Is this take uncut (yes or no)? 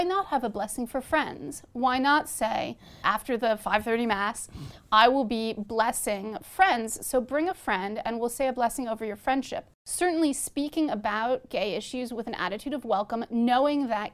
no